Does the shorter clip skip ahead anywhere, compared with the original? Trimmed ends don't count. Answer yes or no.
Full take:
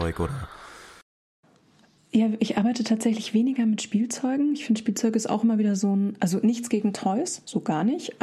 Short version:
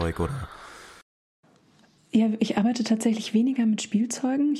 no